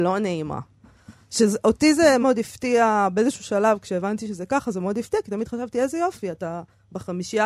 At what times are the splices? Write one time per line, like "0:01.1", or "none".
0:02.2